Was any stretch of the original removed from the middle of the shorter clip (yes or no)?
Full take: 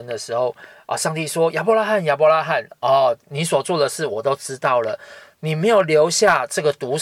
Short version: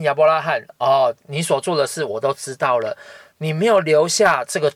no